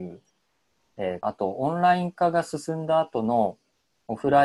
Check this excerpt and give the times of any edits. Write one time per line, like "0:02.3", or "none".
0:01.2